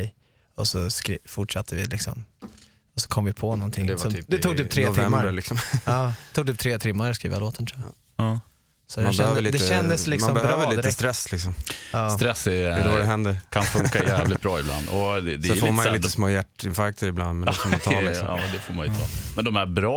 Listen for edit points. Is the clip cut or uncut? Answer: uncut